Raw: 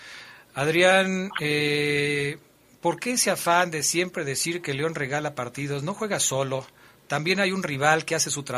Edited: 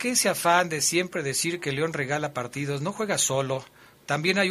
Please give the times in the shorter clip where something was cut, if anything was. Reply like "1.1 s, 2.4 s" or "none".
none